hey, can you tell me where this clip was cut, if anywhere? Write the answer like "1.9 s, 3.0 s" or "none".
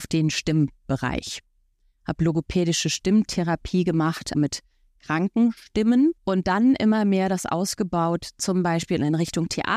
4.3 s, 6.2 s